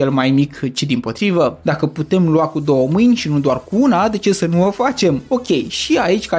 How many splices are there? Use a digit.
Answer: 1